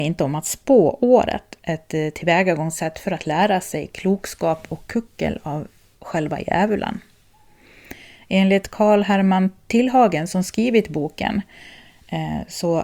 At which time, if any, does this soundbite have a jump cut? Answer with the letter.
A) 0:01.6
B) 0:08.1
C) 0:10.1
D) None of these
A